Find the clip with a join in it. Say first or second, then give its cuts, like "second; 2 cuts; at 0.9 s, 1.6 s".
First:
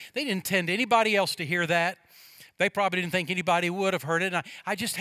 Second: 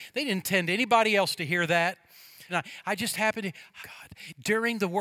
second; 2 cuts; at 2.5 s, 3.8 s